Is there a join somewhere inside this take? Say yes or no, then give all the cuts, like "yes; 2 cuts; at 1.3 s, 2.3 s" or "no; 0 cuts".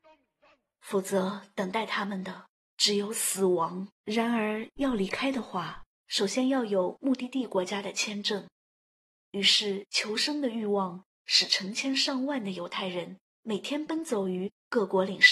yes; 1 cut; at 3.9 s